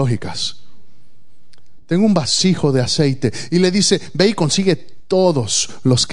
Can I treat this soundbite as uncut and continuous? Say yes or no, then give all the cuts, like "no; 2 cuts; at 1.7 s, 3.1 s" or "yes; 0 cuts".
yes; 0 cuts